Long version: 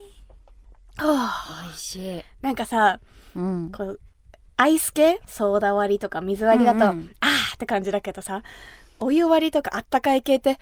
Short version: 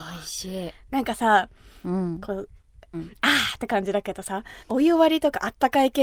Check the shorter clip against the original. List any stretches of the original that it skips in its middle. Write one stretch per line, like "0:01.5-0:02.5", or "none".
0:04.4-0:06.9
0:08.6-0:08.9

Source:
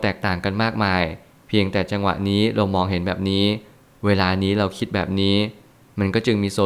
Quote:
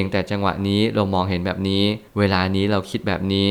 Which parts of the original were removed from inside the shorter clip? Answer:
0:03.7-0:04.0

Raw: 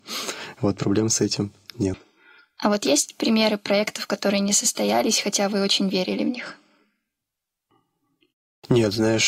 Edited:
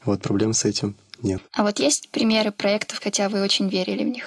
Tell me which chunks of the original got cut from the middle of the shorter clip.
0:02.0-0:02.5
0:04.1-0:05.2

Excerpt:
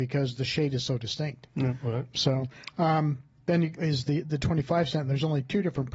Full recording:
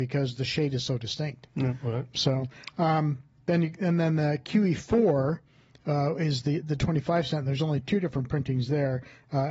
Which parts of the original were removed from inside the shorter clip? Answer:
0:03.8-0:06.2

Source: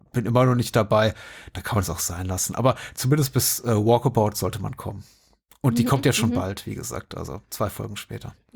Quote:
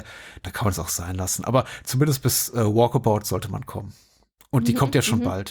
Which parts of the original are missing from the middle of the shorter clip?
none

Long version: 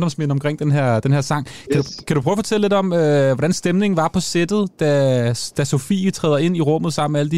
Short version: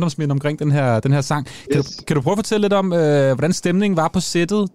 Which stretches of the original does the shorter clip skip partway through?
none

